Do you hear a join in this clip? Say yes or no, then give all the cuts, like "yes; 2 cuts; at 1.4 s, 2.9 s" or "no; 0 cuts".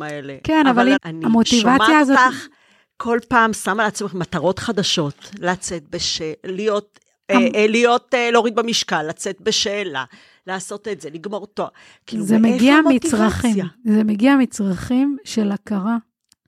yes; 1 cut; at 1.0 s